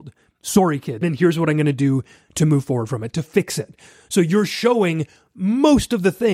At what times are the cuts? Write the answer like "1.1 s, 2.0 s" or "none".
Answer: 1.0 s